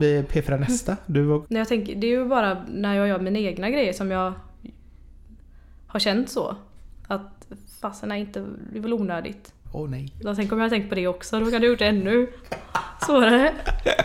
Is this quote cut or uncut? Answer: cut